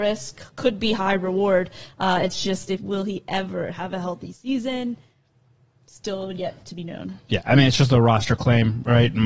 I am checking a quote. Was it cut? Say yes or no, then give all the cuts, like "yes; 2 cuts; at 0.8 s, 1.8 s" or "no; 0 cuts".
no; 0 cuts